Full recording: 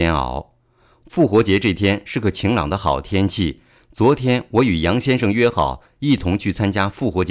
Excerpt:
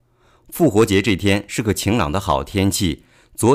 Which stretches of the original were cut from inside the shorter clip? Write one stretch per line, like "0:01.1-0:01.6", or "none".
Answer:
none